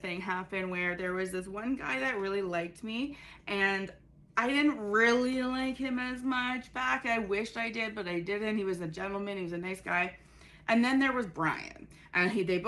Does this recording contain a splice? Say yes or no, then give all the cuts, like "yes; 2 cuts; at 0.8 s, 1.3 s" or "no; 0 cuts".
no; 0 cuts